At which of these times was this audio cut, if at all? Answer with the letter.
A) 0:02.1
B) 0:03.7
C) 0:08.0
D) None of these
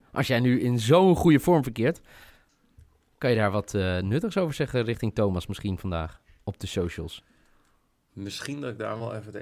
D